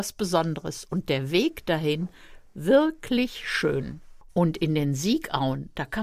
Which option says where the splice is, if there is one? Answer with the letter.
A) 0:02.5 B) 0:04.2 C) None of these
C